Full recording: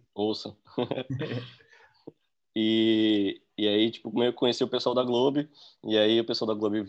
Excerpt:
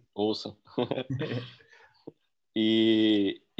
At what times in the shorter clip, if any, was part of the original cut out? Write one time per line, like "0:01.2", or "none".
none